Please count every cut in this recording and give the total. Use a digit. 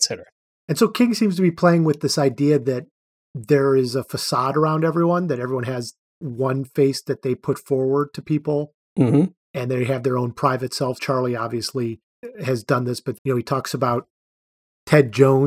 3